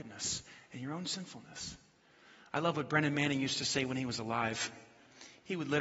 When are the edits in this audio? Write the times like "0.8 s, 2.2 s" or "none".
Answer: none